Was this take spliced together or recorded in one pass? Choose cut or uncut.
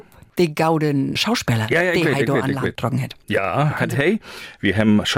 cut